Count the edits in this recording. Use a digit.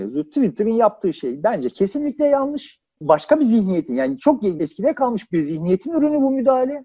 1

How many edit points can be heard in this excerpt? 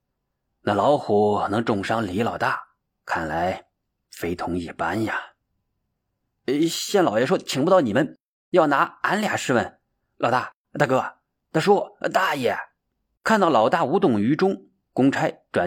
0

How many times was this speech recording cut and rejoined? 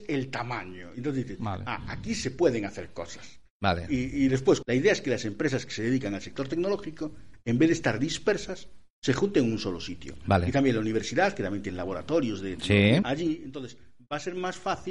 2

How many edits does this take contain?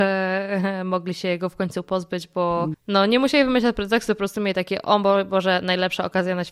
1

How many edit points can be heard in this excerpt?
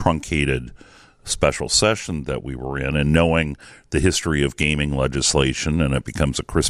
0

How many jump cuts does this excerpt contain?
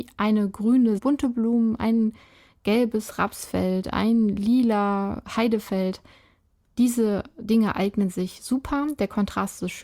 1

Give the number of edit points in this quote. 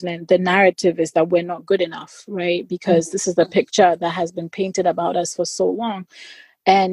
0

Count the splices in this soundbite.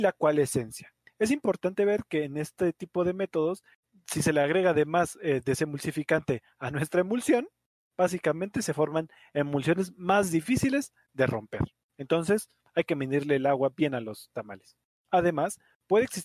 1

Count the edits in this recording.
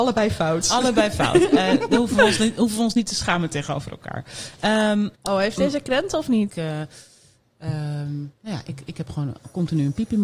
2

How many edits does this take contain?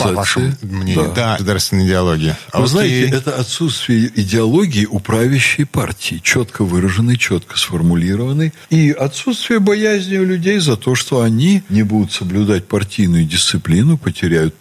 1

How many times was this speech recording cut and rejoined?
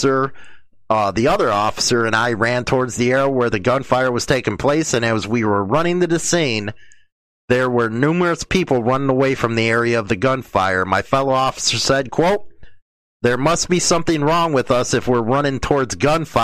0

